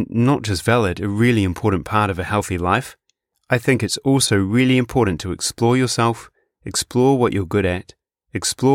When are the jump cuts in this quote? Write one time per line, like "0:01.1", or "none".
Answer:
none